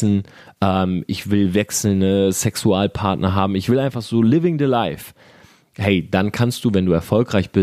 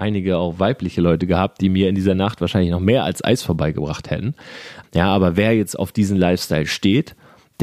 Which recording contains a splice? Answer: second; 1 cut; at 4.8 s

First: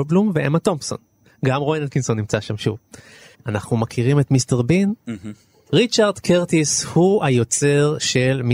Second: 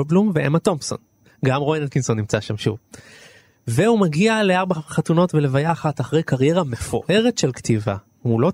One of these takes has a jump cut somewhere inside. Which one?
first; 1 cut; at 3.3 s

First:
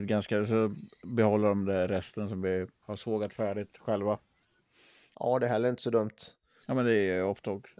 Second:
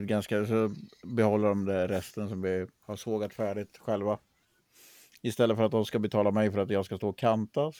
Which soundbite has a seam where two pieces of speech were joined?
first; 2 cuts; at 5.1 s, 6.6 s

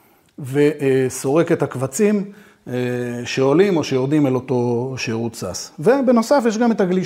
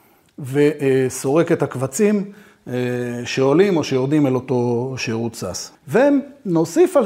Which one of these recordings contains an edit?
second; 1 cut; at 5.7 s

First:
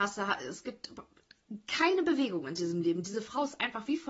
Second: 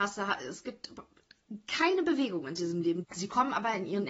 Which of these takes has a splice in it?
second; 1 cut; at 3.0 s

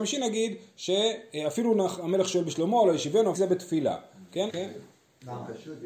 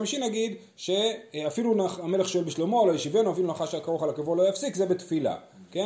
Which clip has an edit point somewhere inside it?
first; 2 cuts; at 3.3 s, 4.5 s

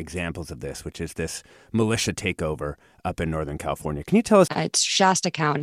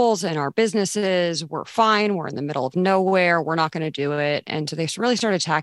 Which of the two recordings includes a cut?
first; 1 cut; at 4.5 s

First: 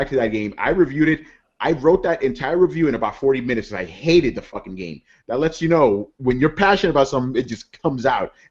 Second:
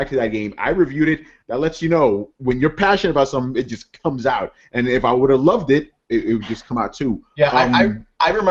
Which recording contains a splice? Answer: second; 1 cut; at 1.4 s

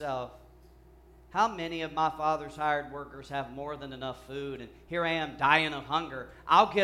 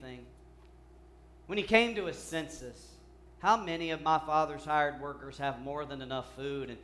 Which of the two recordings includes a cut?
second; 1 cut; at 3.3 s

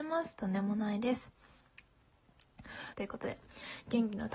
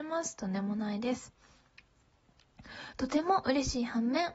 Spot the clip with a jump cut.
first; 1 cut; at 2.9 s

